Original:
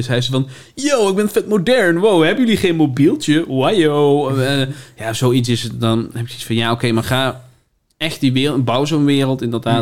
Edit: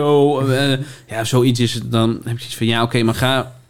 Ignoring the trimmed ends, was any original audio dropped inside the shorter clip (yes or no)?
no